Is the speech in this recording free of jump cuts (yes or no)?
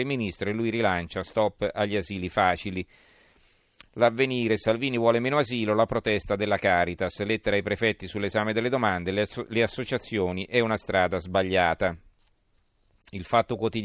yes